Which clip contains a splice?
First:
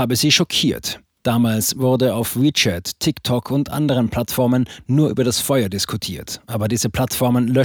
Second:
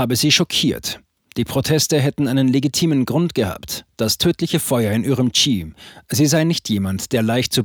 first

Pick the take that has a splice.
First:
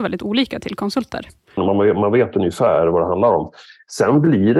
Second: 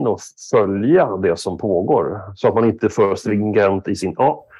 first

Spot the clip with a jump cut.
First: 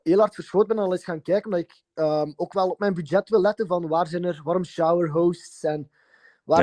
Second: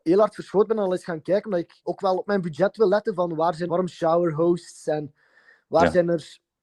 second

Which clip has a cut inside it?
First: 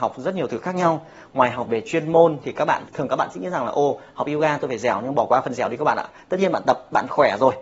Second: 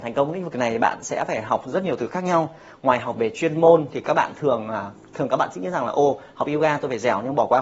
first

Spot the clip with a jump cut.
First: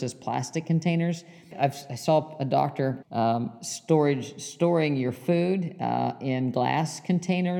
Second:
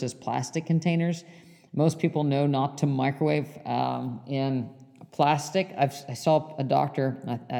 first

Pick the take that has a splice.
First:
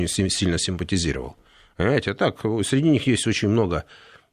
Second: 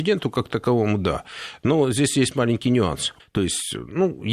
second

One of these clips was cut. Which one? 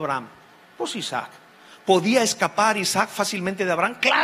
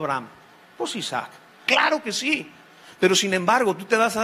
second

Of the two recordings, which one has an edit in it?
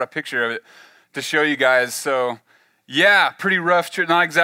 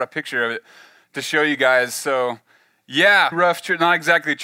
second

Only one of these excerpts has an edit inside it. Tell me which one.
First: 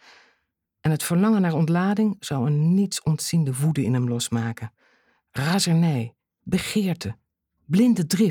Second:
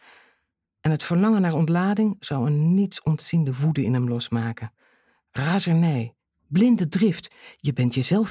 second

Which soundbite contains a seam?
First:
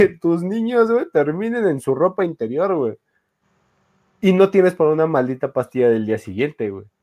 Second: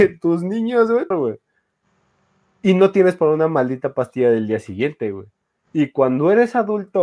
second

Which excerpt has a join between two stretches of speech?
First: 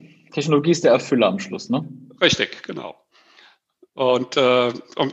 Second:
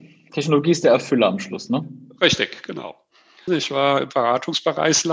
second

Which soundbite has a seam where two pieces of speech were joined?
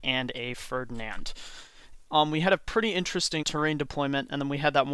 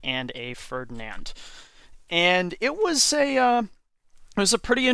first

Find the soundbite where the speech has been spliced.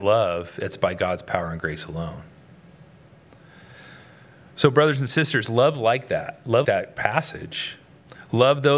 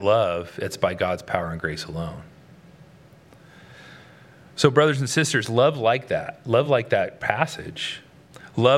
first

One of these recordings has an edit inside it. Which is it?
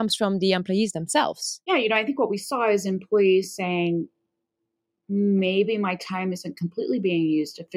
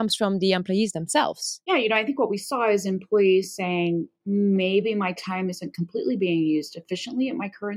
second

